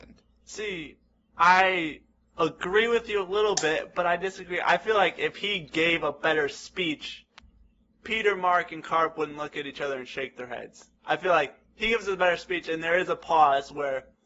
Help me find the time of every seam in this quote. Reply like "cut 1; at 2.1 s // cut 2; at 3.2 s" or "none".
none